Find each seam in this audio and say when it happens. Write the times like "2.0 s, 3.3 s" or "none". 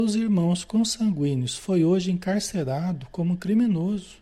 none